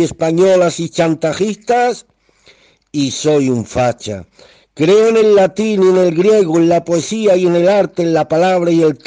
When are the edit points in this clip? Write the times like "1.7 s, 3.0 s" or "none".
none

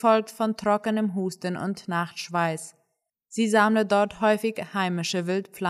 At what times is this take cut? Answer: 3.1 s

